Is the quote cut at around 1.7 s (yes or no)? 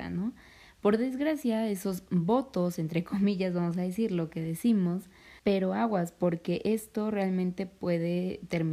no